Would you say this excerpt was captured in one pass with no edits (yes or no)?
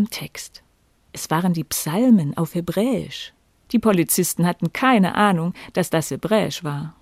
no